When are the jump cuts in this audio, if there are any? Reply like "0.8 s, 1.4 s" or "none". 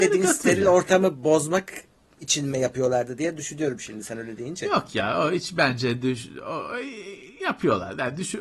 none